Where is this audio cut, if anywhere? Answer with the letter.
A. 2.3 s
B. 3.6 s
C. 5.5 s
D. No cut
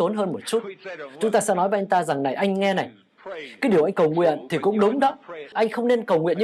C